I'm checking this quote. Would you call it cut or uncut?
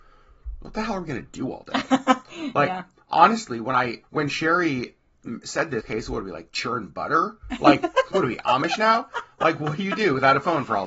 cut